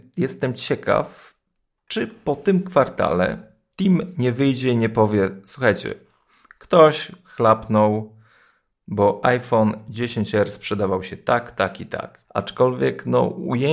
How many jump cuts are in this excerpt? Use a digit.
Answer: 1